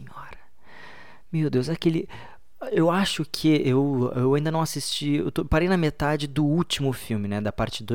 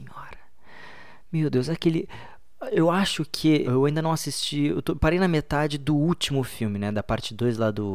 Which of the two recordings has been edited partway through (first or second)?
second